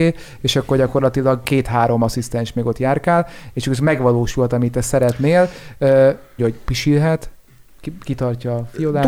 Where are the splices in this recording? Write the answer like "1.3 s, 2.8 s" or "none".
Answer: 6.4 s